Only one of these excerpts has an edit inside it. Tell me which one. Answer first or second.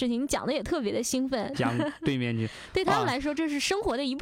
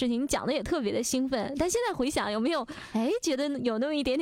first